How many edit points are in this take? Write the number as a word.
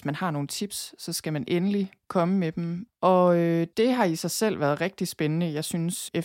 one